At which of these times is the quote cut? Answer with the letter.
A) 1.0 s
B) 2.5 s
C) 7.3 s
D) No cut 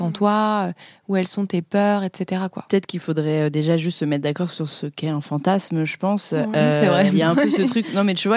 D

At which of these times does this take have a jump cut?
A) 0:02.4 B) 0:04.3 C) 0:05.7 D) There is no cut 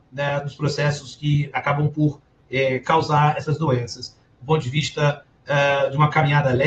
B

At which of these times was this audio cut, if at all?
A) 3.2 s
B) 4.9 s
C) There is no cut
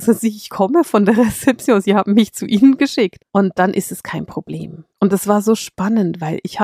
A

